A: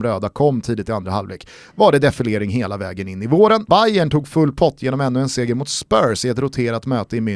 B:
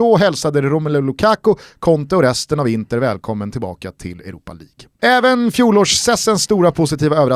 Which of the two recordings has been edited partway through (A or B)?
A